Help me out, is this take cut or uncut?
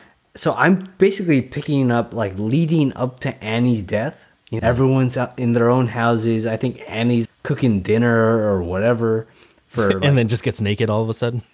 cut